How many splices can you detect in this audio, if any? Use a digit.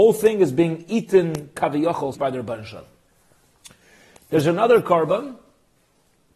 1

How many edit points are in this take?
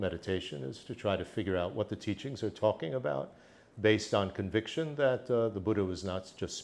0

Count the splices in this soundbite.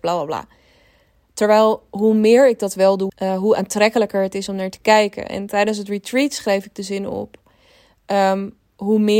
1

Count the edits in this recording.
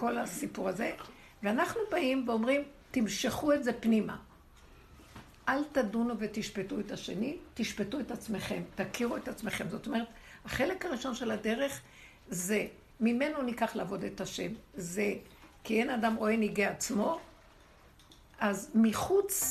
1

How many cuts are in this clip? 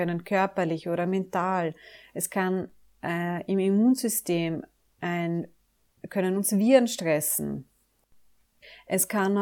0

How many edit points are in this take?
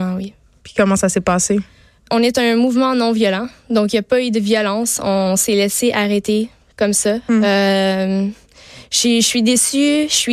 1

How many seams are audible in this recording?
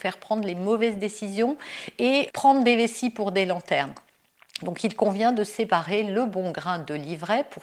0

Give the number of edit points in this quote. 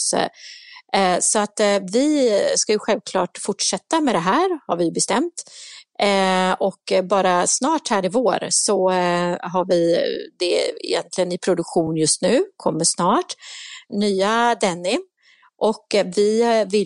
0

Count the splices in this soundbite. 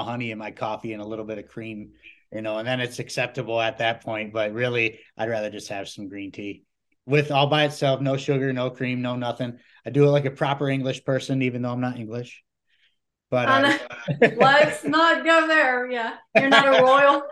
0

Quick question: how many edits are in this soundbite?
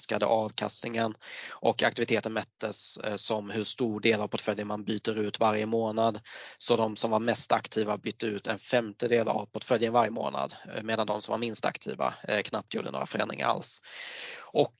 0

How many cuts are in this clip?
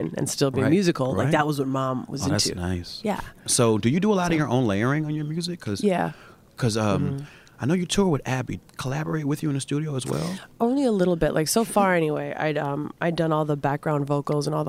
1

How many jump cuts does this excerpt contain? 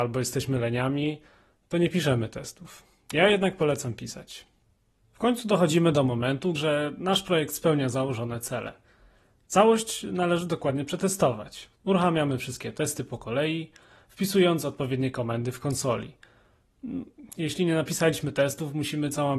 2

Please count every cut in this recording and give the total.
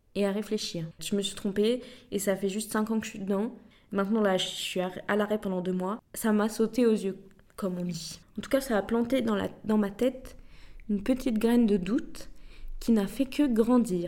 1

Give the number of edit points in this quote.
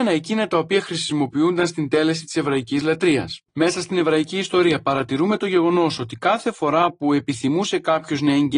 1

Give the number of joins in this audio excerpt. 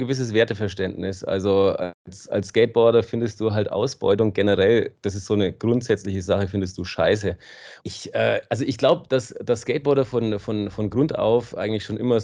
1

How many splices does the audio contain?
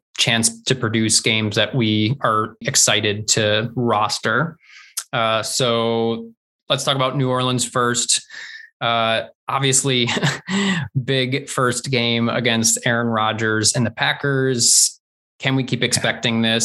1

